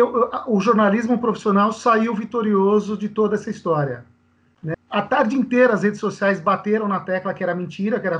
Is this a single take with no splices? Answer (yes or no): no